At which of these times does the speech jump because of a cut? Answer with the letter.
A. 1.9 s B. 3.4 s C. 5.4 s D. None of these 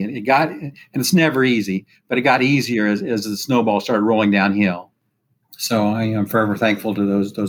D